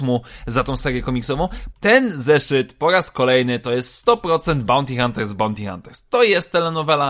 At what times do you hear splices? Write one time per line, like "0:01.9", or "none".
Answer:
0:01.7